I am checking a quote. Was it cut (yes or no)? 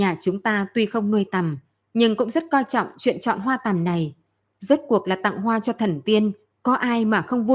no